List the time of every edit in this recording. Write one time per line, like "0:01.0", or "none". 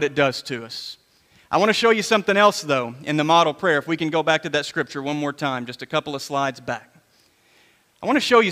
none